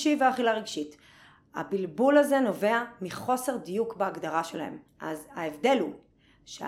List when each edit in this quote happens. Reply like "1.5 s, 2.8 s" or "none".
4.9 s